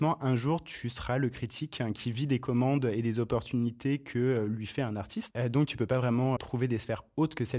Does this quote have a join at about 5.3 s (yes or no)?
yes